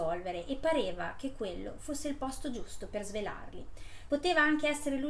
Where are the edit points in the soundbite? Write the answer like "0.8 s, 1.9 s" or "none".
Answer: 4.1 s